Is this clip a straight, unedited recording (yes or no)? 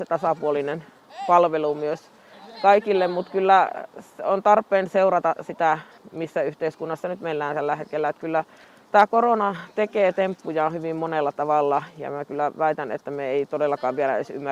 yes